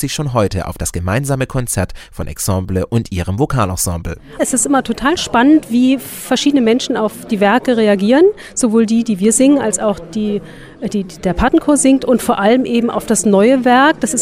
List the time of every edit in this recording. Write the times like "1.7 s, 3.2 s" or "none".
4.4 s